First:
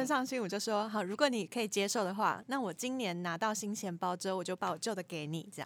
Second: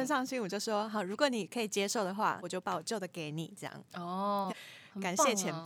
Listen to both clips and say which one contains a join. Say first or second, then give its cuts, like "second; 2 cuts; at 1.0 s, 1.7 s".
second; 2 cuts; at 2.4 s, 4.5 s